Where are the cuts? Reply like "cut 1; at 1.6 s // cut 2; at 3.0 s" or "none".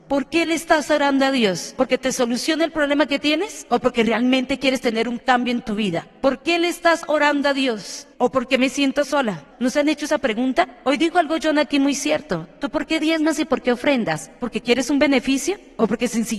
cut 1; at 8.1 s // cut 2; at 9.5 s